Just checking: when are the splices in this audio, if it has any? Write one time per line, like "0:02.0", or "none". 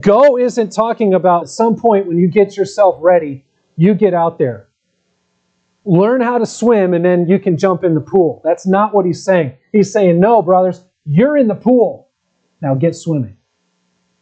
0:01.4